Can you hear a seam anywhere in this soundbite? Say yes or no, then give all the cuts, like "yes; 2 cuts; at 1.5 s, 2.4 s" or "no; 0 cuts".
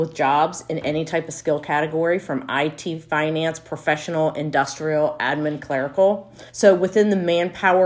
yes; 1 cut; at 6.5 s